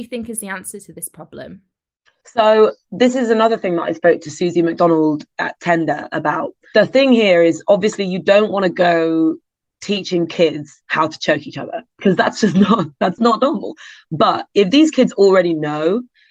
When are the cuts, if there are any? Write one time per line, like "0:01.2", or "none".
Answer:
0:13.2

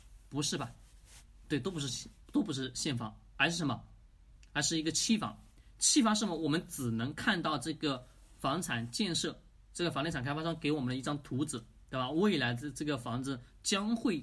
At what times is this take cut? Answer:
none

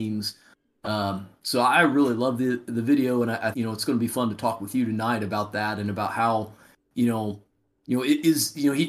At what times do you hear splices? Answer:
0:03.5

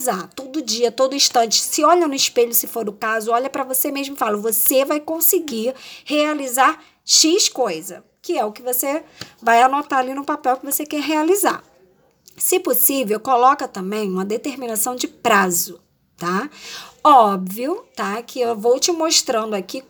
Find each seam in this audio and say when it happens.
none

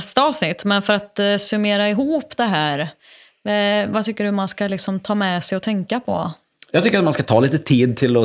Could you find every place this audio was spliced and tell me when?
none

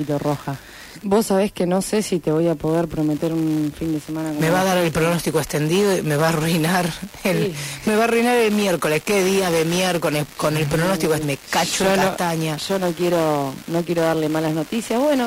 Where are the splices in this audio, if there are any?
0:01.0
0:11.2

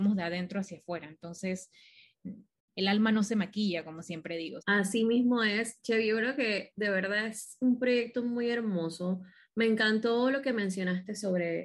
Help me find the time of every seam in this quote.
0:04.6

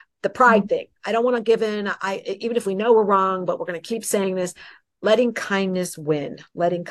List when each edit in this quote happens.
0:01.0

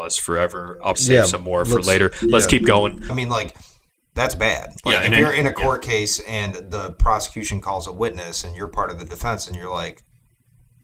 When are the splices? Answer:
0:00.9
0:03.1

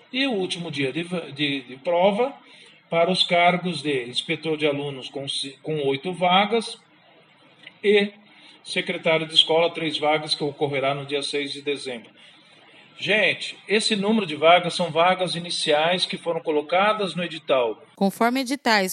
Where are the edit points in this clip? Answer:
none

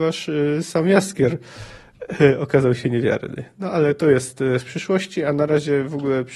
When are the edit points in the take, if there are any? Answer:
none

